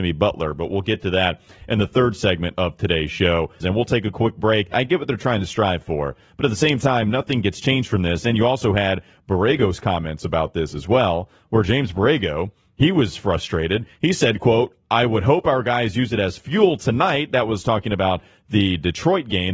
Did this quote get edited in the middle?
yes; 2 cuts; at 3.6 s, 4.7 s

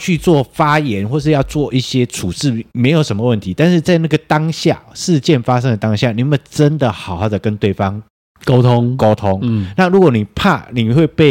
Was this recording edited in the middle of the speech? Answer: no; 0 cuts

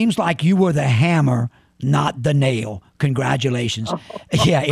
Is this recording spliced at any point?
no; 0 cuts

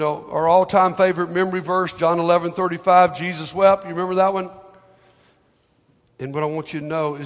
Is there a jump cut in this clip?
yes; 1 cut; at 6.0 s

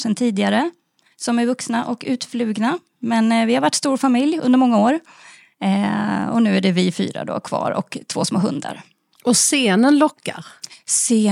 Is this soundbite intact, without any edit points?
yes; 0 cuts

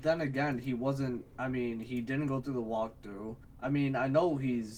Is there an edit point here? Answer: yes; 1 cut; at 3.4 s

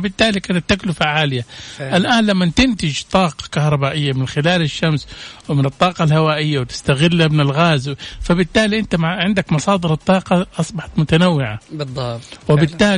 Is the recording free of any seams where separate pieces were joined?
yes; 0 cuts

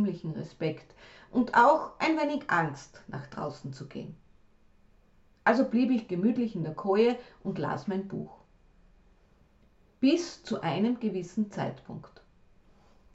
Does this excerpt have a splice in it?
no; 0 cuts

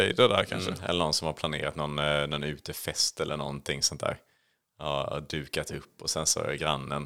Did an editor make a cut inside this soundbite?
no; 0 cuts

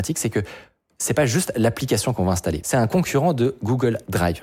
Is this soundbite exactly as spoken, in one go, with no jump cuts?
no; 1 cut; at 2.6 s

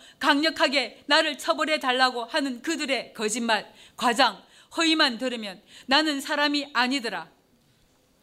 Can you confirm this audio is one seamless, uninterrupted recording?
yes; 0 cuts

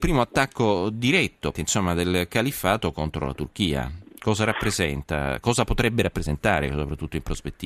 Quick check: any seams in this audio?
yes; 1 cut; at 1.5 s

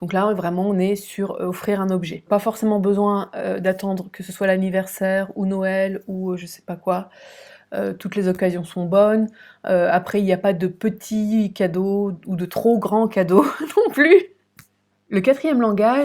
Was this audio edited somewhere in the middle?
no; 0 cuts

